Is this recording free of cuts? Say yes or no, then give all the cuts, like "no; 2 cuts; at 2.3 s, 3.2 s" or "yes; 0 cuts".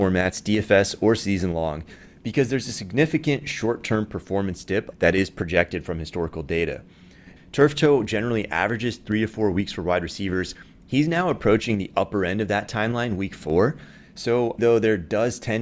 no; 3 cuts; at 4.9 s, 7.4 s, 14.6 s